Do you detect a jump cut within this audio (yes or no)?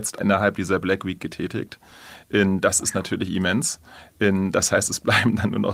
no